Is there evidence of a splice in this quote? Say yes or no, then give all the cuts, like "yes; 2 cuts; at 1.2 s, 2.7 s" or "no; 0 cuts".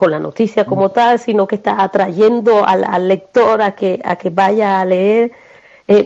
no; 0 cuts